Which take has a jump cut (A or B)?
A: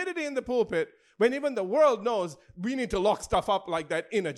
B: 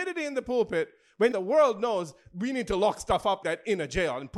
B